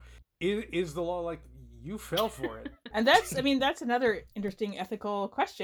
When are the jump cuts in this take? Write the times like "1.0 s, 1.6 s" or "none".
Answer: 2.9 s